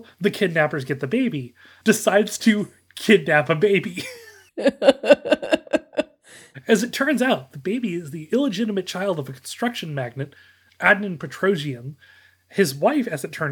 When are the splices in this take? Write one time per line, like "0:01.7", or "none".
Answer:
0:01.8